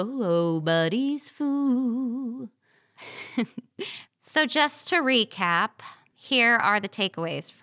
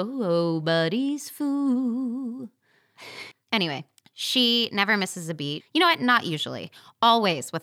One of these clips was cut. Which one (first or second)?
second